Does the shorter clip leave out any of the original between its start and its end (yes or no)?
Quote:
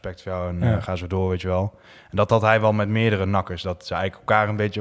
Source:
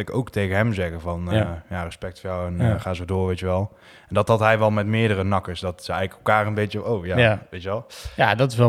no